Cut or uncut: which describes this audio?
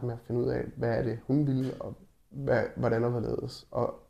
uncut